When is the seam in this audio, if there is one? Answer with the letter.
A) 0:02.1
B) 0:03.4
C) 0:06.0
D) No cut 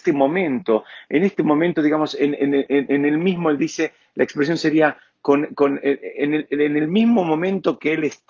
D